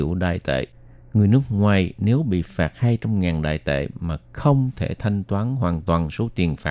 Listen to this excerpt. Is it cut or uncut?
uncut